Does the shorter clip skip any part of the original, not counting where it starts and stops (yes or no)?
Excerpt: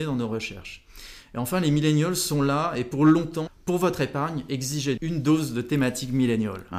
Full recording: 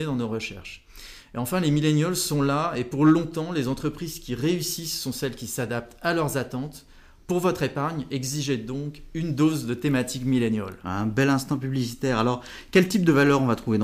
yes